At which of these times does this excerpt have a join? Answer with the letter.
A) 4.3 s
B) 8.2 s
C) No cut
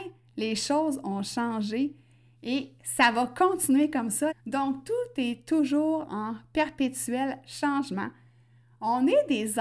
A